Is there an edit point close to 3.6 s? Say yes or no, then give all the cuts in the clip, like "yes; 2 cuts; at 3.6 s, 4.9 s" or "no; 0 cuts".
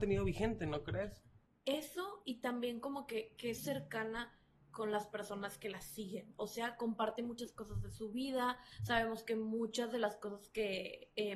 yes; 2 cuts; at 1.5 s, 3.6 s